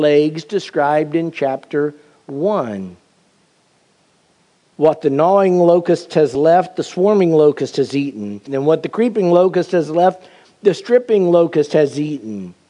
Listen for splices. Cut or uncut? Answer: cut